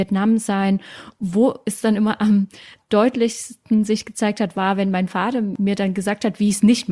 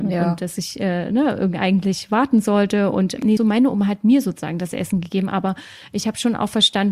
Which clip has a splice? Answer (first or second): second